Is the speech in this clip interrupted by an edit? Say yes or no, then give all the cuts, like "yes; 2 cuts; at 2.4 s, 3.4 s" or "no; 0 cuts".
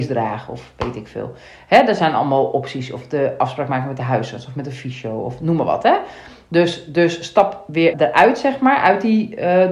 yes; 1 cut; at 7.9 s